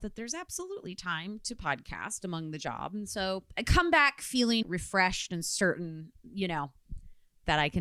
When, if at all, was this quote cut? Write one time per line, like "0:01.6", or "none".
0:04.6

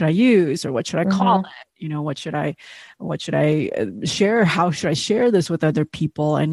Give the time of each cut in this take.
none

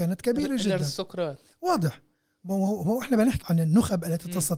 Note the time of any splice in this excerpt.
0:03.4

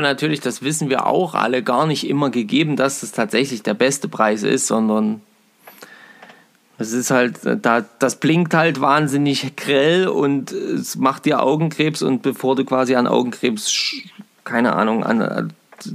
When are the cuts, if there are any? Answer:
none

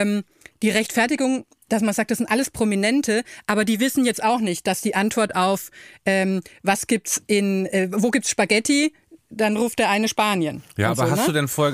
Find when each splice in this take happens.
none

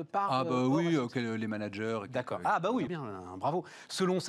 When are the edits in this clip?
0:02.9

